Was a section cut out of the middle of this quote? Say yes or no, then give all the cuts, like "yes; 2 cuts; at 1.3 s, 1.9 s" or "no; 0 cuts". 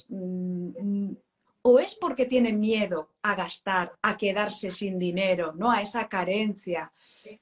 yes; 1 cut; at 1.5 s